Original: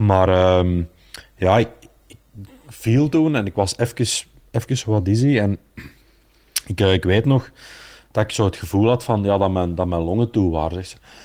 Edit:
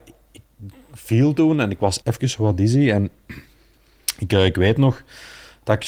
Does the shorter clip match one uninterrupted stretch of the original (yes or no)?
no